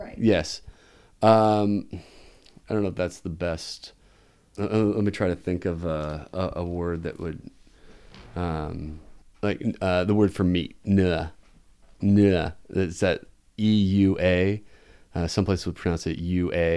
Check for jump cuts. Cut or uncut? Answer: uncut